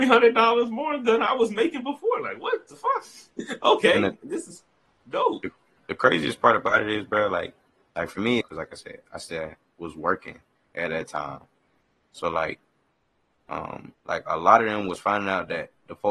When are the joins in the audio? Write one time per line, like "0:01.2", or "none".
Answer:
0:08.4
0:13.9